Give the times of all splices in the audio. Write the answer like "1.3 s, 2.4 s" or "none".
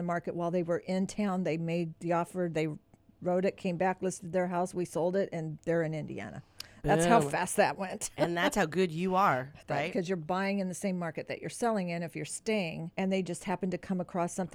9.6 s, 12.9 s